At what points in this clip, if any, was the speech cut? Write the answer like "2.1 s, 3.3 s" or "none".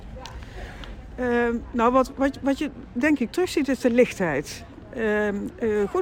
none